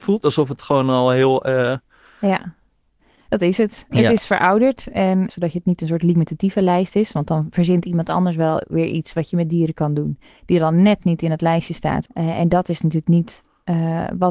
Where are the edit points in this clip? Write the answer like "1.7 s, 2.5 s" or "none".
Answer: 5.3 s, 12.1 s